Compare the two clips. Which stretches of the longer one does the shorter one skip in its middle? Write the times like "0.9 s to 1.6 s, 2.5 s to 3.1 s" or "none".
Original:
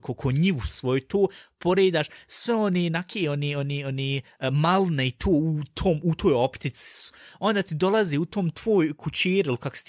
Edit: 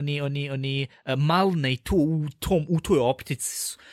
none